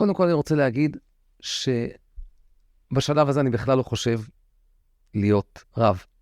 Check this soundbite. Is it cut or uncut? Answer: uncut